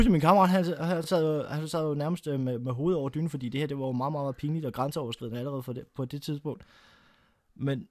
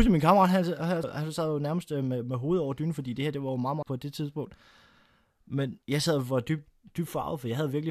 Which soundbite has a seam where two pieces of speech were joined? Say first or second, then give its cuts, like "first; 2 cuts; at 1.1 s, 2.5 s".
second; 3 cuts; at 1.0 s, 3.8 s, 5.8 s